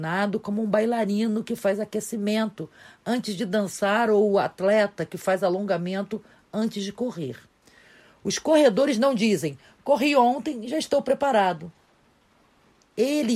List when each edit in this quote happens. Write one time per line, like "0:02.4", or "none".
none